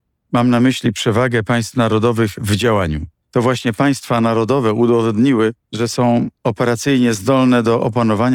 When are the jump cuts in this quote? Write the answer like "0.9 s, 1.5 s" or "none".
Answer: 3.2 s, 5.6 s